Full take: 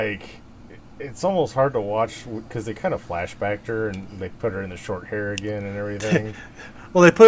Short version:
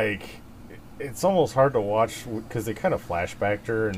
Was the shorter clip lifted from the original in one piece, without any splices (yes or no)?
yes